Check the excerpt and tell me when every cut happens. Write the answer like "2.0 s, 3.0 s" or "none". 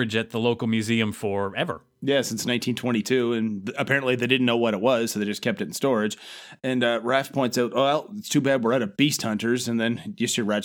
none